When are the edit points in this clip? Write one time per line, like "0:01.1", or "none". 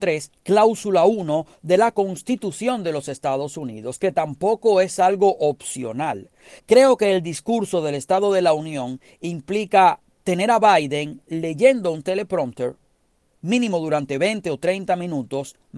none